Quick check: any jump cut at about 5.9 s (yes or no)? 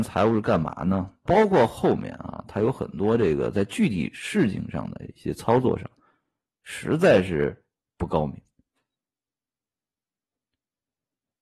no